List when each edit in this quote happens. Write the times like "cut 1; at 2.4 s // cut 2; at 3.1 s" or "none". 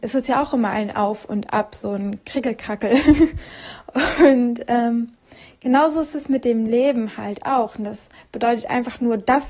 none